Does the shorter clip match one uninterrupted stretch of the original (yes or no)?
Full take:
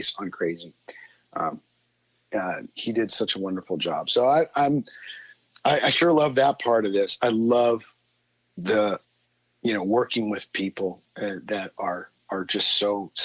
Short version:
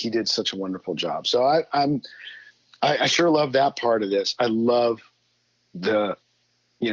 yes